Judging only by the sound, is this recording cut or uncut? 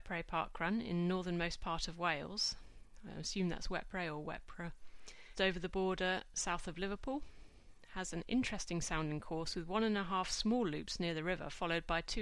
cut